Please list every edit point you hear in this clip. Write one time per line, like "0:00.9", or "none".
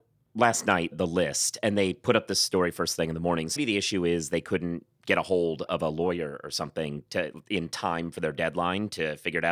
0:00.9
0:03.6